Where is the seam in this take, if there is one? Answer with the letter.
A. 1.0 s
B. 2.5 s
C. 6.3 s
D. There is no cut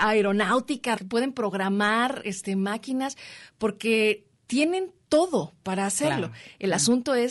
A